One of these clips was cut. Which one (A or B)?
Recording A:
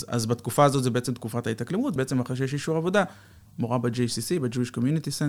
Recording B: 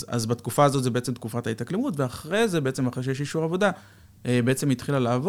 A